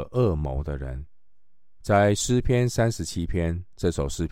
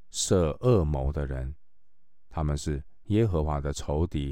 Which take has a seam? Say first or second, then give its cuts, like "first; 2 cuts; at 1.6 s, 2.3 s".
first; 1 cut; at 1.8 s